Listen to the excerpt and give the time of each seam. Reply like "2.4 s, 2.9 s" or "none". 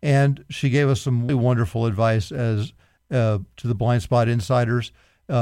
1.3 s